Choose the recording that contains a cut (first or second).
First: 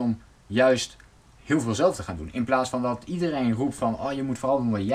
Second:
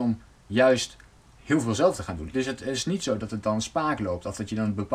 second